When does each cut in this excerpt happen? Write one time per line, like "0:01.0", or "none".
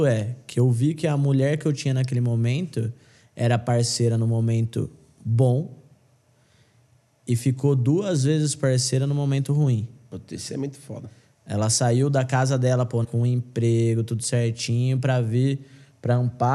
0:13.0